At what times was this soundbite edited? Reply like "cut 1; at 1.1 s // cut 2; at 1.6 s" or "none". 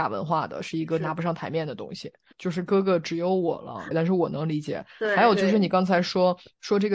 cut 1; at 2.3 s // cut 2; at 3.9 s